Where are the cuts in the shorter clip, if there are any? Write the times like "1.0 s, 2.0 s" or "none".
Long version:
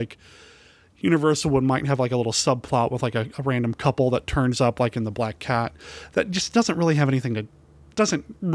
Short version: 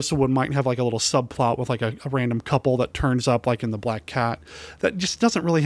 none